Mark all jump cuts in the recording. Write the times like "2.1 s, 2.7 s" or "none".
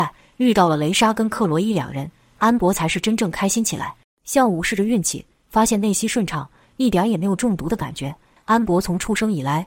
4.0 s, 8.4 s